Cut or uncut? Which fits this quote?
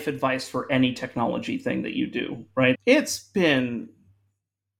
cut